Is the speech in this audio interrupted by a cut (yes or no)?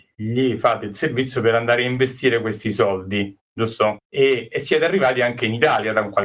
yes